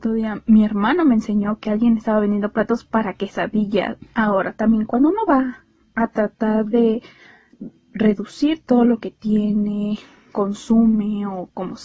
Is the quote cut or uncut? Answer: cut